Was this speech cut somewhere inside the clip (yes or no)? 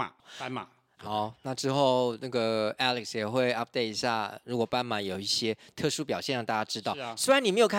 yes